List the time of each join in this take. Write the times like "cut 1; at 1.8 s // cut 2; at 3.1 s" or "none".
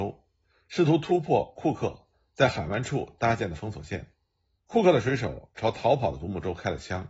cut 1; at 4.6 s

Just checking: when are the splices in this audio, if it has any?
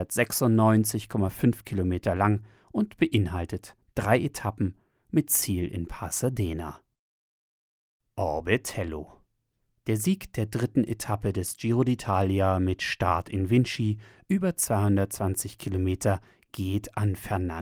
none

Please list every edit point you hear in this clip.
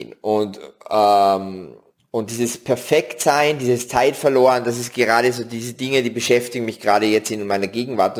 none

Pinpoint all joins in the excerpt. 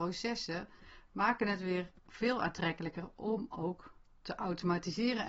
cut 1; at 2.0 s

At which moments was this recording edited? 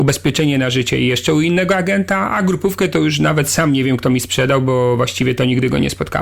none

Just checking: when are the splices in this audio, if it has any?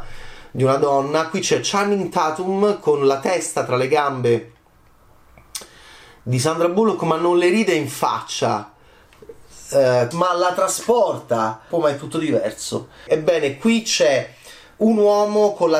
cut 1; at 10.1 s // cut 2; at 11.7 s // cut 3; at 13.1 s

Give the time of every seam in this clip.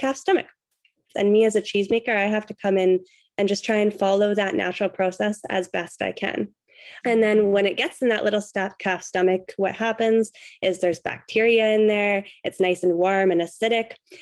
cut 1; at 1.1 s // cut 2; at 7.0 s

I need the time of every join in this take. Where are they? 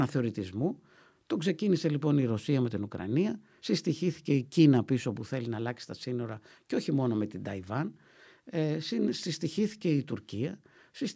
none

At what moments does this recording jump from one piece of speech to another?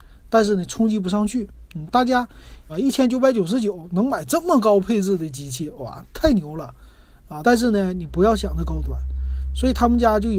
cut 1; at 2.7 s // cut 2; at 7.4 s

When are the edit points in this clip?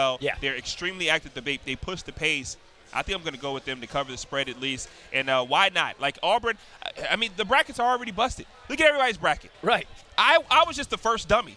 cut 1; at 9.5 s

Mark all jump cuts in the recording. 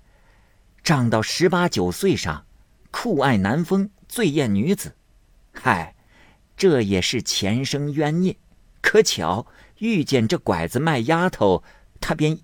none

